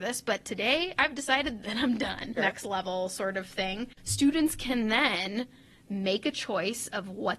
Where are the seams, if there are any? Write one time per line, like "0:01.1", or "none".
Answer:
0:02.4